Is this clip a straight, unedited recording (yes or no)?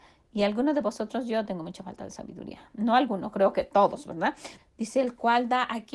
no